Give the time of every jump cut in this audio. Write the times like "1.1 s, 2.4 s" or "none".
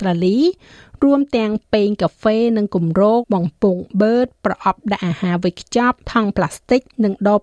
3.2 s, 6.0 s